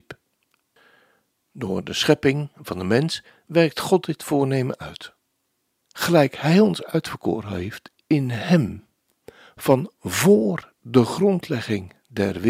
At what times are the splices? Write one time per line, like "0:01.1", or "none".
0:05.7